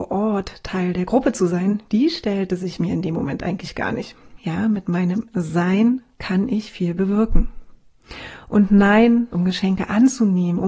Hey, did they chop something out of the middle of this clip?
yes; 2 cuts; at 4.4 s, 9.3 s

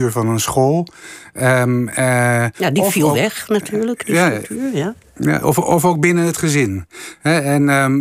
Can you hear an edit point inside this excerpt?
no; 0 cuts

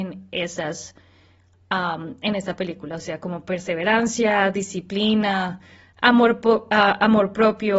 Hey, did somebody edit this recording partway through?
no; 0 cuts

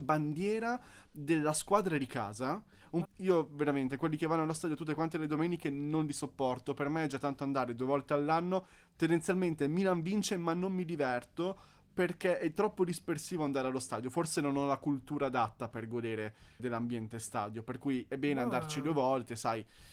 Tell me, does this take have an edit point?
yes; 2 cuts; at 3.0 s, 16.6 s

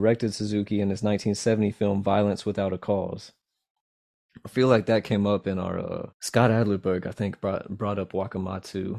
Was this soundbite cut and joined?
yes; 1 cut; at 6.1 s

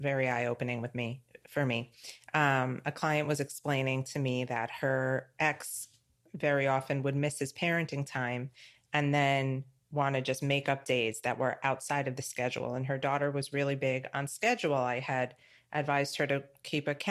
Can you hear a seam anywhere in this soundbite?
no; 0 cuts

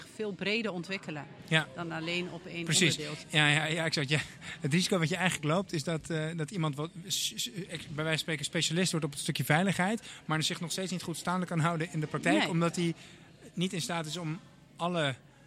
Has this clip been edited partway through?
yes; 1 cut; at 3.2 s

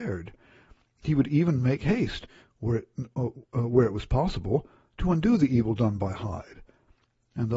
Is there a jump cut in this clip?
no; 0 cuts

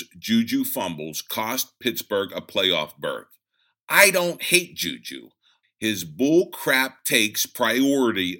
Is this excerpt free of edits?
no; 1 cut; at 5.6 s

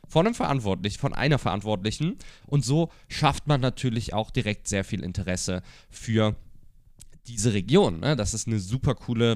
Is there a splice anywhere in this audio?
yes; 1 cut; at 2.4 s

